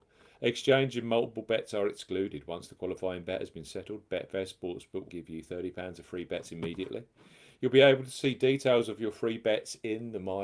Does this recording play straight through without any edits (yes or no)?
no